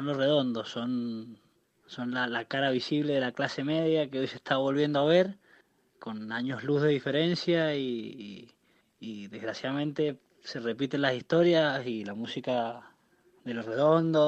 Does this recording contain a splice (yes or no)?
no